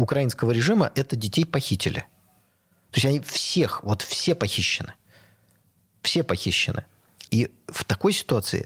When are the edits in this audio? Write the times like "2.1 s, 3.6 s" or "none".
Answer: 7.2 s